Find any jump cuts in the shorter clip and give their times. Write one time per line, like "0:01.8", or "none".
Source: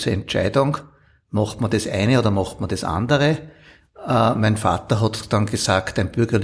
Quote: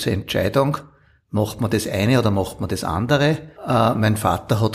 0:03.5